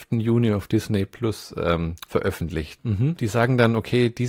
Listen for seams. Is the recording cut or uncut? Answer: cut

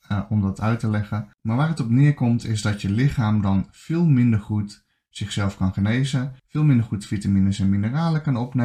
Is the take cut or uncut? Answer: cut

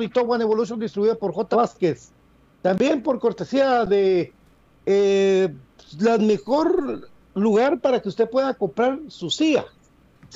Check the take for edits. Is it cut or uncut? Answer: cut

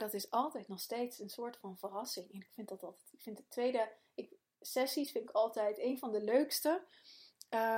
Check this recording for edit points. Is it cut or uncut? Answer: uncut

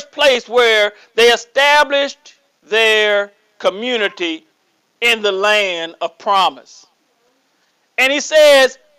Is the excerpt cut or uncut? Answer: uncut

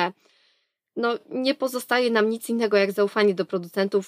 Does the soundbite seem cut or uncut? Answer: uncut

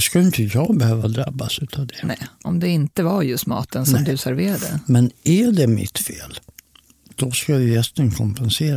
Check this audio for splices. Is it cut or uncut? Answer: uncut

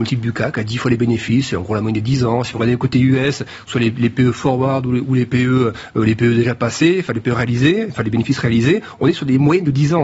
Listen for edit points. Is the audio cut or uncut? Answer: uncut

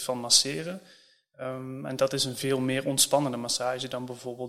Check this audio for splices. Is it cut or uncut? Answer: uncut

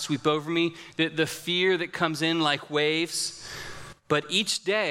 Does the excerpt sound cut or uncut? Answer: uncut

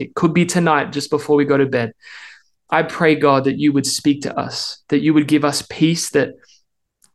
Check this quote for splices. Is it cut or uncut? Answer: uncut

